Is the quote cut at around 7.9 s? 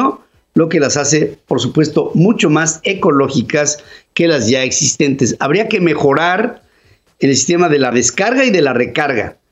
yes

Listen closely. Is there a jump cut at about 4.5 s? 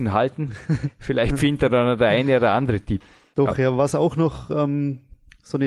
no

